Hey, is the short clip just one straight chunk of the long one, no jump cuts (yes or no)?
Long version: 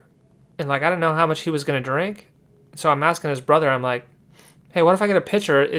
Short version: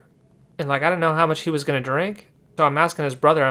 no